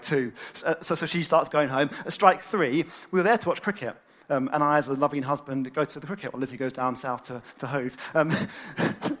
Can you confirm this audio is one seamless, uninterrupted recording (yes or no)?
yes